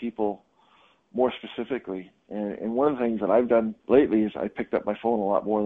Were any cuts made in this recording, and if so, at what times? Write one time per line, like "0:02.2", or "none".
0:03.8

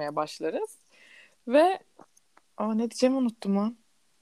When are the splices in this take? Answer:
none

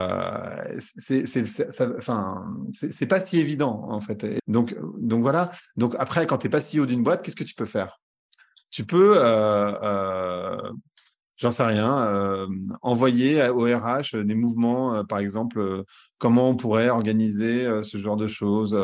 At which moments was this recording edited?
0:04.4

